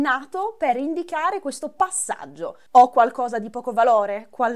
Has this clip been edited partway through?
yes; 1 cut; at 2.7 s

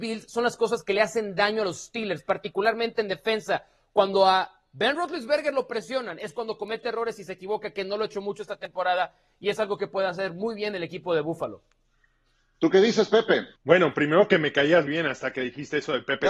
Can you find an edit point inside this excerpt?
yes; 2 cuts; at 13.6 s, 14.9 s

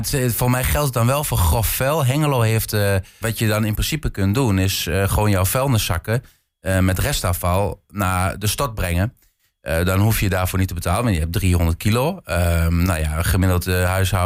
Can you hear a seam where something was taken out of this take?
yes; 1 cut; at 3.2 s

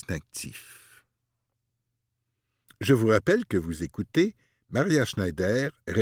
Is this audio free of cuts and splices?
yes; 0 cuts

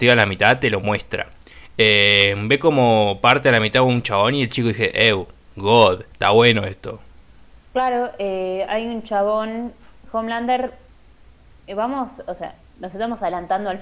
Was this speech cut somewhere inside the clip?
no; 0 cuts

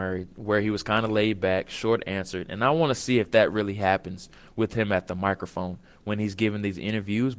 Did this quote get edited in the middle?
no; 0 cuts

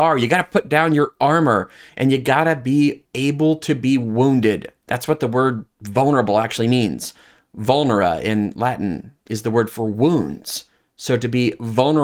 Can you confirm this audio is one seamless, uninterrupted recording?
yes; 0 cuts

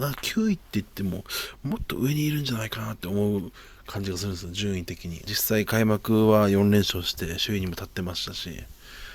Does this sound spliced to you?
yes; 1 cut; at 5.3 s

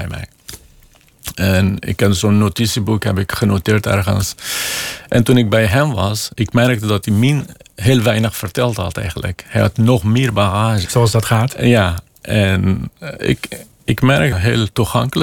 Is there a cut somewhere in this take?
yes; 2 cuts; at 10.8 s, 14.3 s

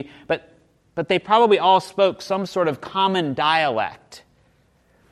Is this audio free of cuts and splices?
yes; 0 cuts

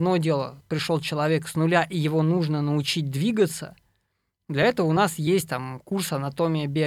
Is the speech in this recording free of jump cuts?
yes; 0 cuts

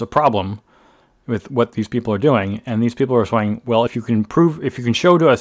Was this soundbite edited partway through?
no; 0 cuts

